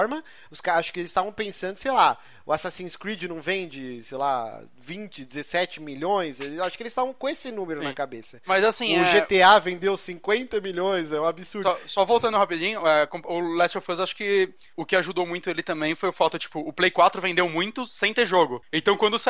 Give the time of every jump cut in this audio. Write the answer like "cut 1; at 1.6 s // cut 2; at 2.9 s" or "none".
none